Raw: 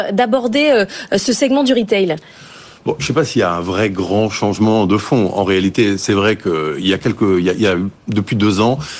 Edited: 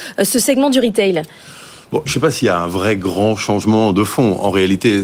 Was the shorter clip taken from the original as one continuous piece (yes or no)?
yes